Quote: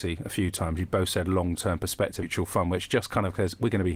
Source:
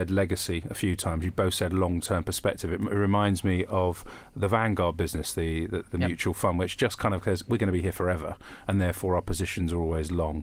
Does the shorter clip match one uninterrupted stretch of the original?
no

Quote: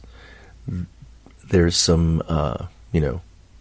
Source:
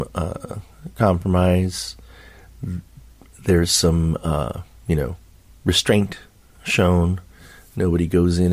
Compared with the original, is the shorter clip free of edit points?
yes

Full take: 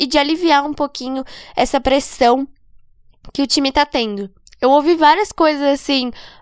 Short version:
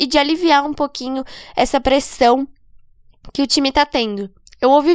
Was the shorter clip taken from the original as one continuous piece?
yes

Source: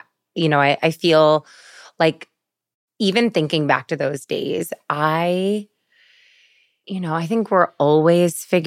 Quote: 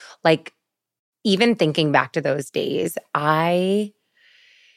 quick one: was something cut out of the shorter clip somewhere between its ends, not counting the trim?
no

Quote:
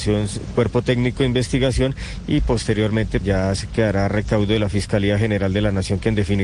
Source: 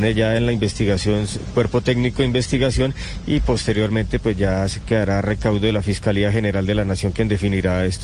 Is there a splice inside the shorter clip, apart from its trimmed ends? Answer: yes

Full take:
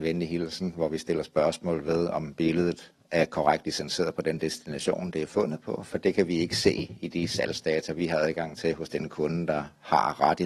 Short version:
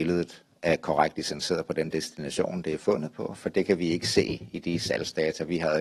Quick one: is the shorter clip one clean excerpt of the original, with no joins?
yes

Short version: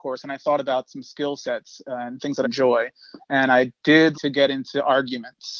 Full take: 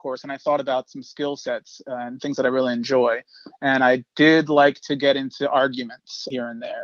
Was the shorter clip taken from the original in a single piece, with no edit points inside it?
no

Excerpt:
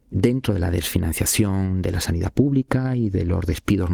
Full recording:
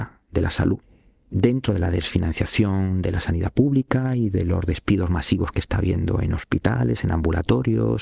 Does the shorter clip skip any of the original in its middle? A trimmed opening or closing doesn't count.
no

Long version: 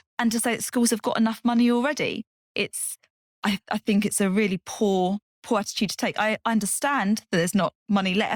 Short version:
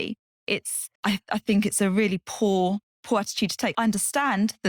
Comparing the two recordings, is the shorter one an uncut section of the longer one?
no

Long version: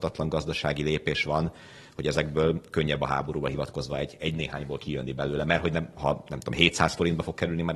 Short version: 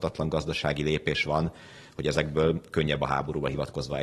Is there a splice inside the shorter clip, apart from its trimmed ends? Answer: no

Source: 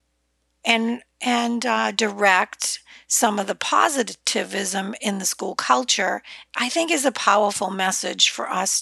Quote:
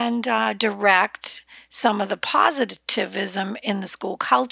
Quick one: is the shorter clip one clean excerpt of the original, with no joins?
yes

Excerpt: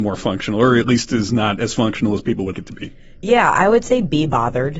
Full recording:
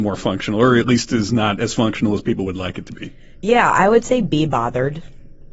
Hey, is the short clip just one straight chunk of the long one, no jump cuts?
no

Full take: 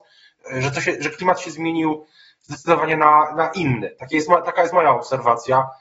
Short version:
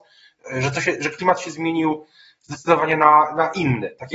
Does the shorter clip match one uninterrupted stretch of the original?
yes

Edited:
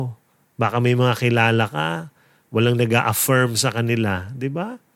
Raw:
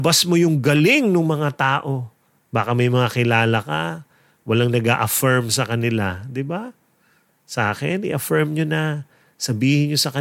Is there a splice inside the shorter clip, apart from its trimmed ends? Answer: no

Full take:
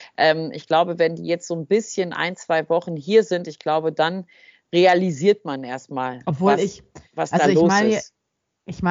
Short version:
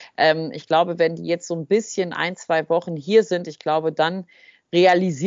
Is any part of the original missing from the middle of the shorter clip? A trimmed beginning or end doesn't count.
no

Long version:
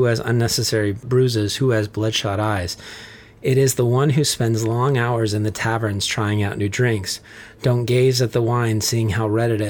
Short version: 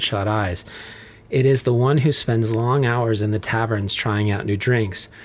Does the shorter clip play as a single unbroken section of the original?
yes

